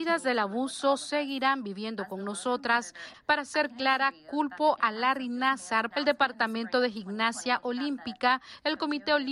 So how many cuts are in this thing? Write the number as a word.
two